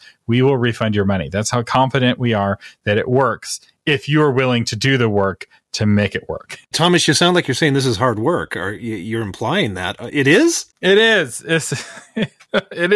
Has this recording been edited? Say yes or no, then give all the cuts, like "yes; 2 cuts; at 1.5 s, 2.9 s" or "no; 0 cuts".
yes; 1 cut; at 6.7 s